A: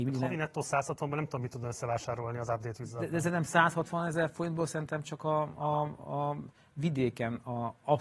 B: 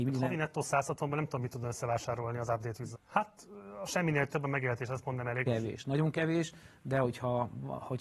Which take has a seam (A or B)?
B